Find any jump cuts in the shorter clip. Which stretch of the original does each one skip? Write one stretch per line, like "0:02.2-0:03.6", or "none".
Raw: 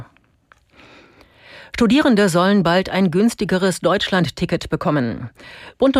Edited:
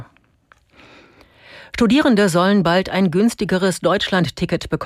none